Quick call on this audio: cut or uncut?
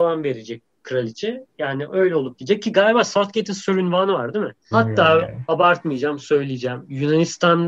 cut